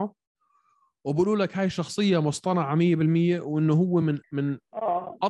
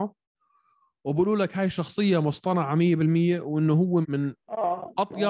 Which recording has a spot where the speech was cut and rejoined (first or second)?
second